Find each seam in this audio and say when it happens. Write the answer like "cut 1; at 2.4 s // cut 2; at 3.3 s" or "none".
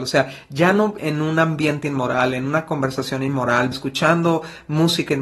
cut 1; at 1.0 s // cut 2; at 3.7 s